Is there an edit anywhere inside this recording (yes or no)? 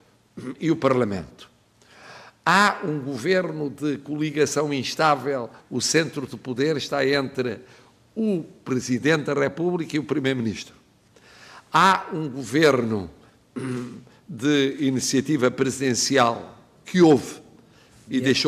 yes